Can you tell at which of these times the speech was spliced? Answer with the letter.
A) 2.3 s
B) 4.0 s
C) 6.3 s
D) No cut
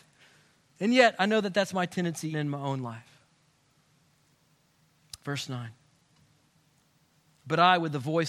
A